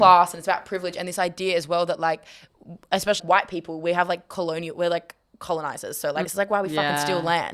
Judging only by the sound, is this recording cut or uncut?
cut